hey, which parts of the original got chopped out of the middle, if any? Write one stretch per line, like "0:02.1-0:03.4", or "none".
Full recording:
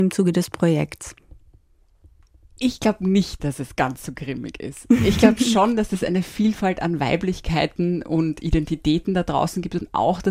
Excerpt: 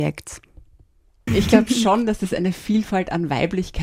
0:02.0-0:05.0